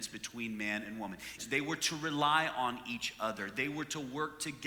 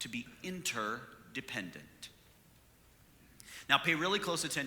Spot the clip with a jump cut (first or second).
first